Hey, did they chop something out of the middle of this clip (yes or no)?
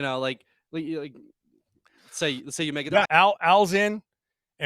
yes